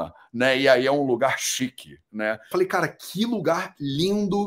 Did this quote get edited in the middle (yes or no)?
yes